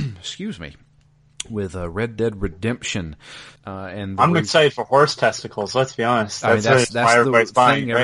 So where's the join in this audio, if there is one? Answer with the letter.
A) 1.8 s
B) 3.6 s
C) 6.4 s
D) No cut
B